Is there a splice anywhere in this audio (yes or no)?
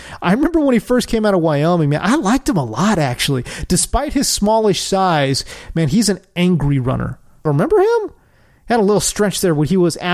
yes